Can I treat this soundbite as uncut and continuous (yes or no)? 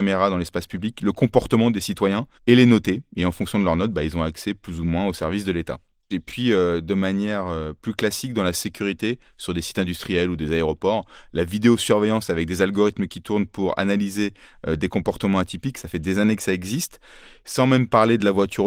no